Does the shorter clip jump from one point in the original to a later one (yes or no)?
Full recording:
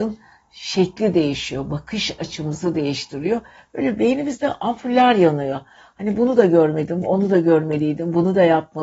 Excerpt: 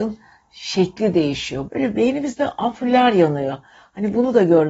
yes